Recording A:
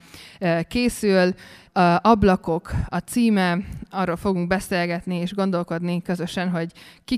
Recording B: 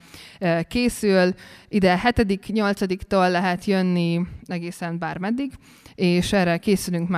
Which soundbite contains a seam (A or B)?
A